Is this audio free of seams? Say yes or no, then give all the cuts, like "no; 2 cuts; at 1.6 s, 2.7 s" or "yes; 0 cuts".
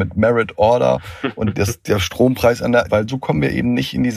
no; 1 cut; at 2.9 s